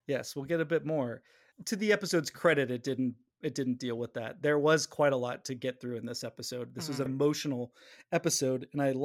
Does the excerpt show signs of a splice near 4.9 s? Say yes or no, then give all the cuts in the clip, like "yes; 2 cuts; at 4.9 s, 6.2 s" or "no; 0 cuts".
no; 1 cut; at 7.1 s